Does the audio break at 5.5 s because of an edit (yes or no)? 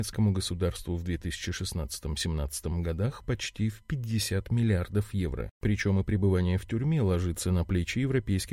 yes